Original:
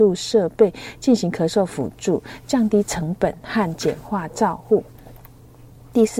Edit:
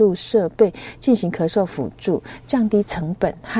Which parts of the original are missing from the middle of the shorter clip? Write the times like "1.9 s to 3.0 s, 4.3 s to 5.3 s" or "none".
none

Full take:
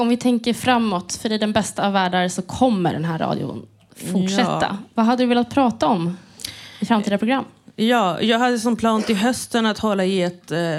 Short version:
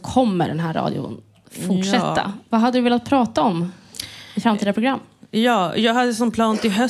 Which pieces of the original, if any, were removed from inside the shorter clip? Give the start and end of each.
none

